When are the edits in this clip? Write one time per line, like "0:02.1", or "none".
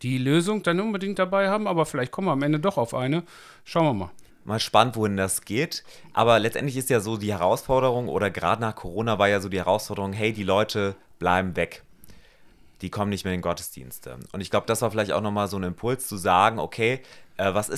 0:04.3